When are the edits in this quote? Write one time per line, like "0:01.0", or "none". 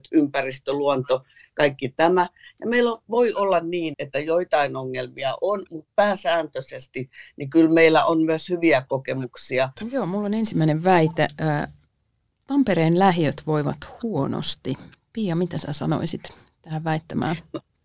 0:03.9
0:09.8